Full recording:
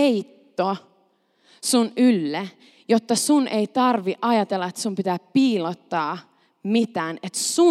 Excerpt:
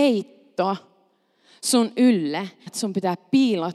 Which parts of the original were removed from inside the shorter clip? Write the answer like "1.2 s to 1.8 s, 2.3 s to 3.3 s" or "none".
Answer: 2.7 s to 4.7 s